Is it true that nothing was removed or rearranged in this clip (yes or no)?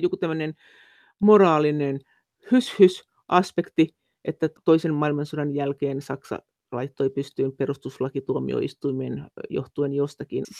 yes